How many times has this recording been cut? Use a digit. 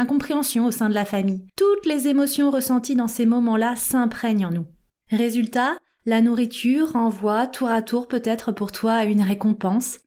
1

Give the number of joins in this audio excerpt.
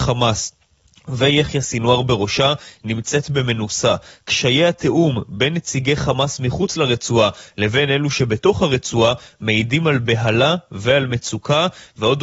1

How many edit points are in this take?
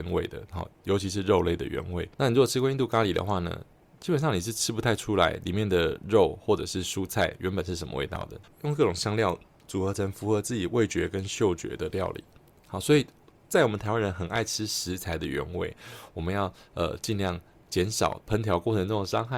2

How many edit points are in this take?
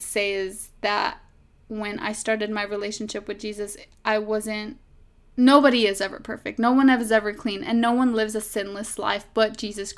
0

